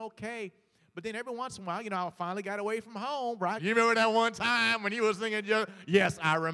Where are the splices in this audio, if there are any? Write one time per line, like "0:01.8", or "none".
0:03.6